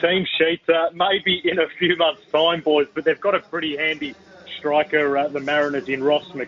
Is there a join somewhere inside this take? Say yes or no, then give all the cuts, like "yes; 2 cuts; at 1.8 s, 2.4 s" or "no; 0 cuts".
no; 0 cuts